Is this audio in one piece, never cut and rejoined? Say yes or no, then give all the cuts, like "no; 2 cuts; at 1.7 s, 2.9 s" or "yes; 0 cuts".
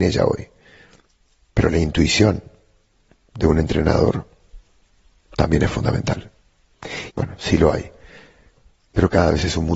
no; 1 cut; at 7.1 s